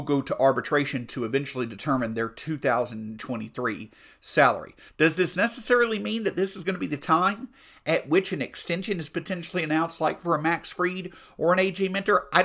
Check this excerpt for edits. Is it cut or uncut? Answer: cut